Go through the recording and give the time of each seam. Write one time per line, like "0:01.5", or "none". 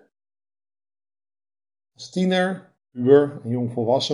0:01.8